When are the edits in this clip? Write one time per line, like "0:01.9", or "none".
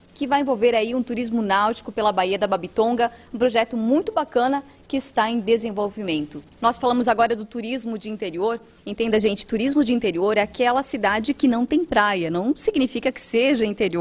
0:06.5

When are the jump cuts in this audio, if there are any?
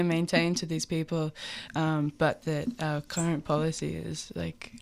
none

